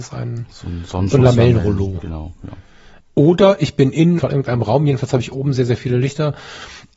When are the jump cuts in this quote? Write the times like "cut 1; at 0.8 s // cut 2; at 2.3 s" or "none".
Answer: cut 1; at 3.0 s // cut 2; at 4.2 s